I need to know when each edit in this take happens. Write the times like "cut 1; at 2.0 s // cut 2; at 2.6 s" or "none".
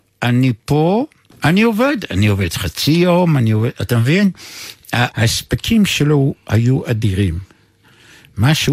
cut 1; at 1.3 s // cut 2; at 5.1 s